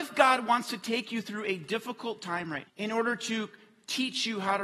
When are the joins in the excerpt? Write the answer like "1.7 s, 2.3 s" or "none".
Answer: 2.6 s